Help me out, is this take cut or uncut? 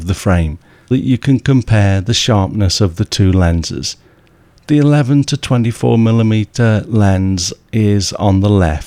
cut